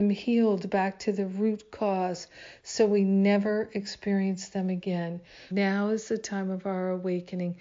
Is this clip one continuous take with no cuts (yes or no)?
no